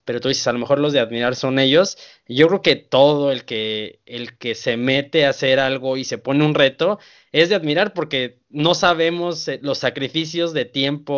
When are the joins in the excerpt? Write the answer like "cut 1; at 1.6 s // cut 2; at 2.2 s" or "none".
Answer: none